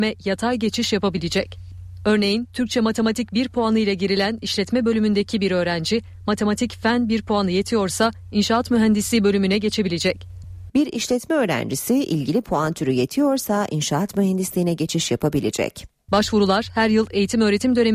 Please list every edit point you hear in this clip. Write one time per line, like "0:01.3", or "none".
0:10.7
0:16.1